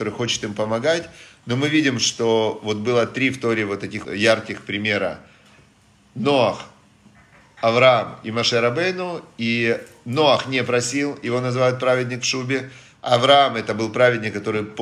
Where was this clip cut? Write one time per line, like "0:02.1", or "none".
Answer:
0:04.0